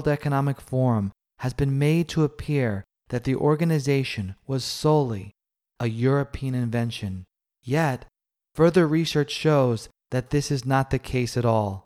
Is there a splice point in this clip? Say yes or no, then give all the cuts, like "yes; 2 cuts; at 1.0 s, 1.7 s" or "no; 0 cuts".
no; 0 cuts